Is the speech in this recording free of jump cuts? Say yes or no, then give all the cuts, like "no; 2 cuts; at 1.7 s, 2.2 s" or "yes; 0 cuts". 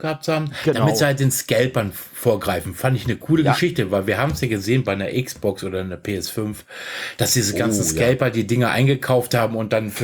yes; 0 cuts